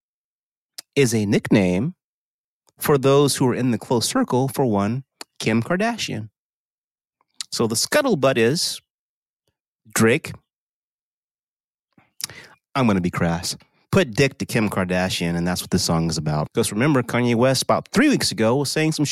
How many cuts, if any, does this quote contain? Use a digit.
1